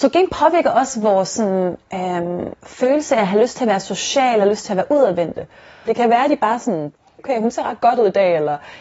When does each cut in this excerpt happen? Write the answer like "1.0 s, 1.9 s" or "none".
5.9 s, 7.2 s